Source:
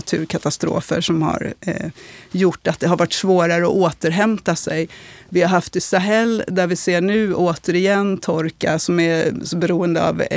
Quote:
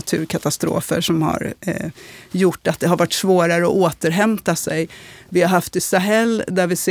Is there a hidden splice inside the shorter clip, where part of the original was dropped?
no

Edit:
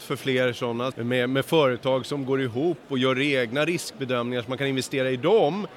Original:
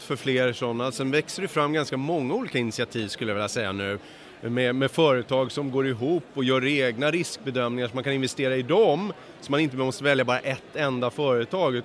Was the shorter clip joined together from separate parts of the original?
yes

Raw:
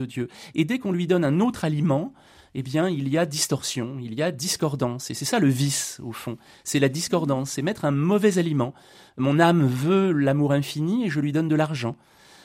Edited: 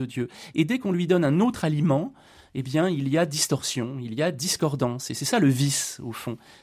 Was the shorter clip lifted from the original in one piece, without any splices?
yes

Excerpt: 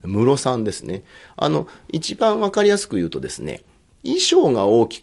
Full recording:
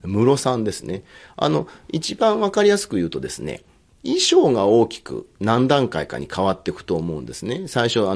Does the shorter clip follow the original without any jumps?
yes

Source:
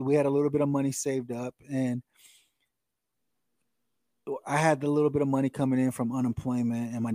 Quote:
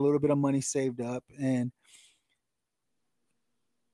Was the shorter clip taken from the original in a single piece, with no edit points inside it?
yes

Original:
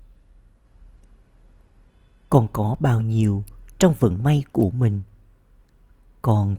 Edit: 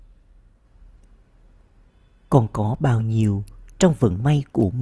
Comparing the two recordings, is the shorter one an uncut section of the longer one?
yes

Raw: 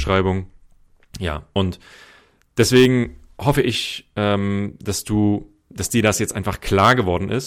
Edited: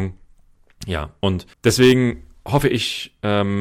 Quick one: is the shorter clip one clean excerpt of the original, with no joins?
no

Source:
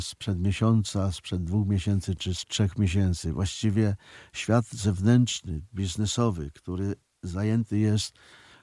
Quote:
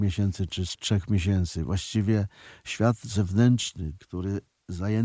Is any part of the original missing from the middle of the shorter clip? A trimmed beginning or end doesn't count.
yes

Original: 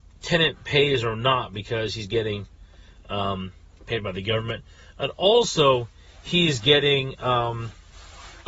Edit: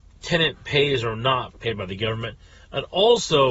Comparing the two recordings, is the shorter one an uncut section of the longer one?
no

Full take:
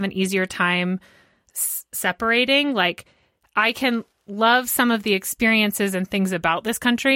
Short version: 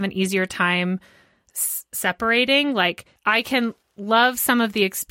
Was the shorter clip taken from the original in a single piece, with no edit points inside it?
no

